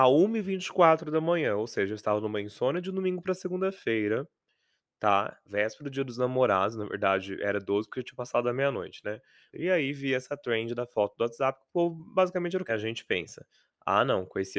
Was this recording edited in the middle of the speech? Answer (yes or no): yes